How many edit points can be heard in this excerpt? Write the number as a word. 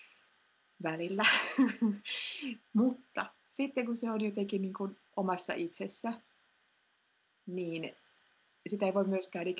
two